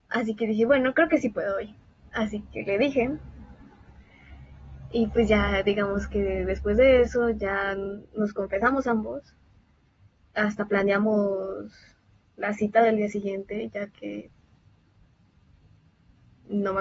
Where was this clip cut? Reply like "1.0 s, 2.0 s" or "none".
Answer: none

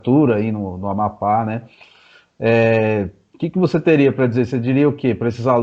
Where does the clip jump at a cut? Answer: none

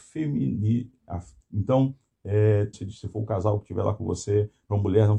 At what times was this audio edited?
1.4 s, 2.7 s

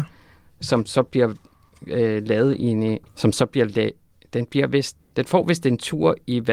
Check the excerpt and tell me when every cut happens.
3.1 s, 5.0 s

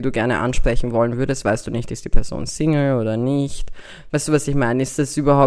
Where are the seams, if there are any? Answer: 4.1 s

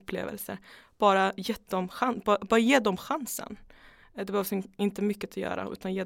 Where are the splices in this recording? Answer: none

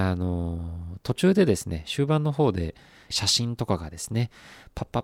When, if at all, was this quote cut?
3.1 s

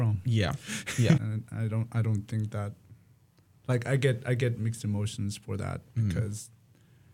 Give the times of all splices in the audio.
1.2 s

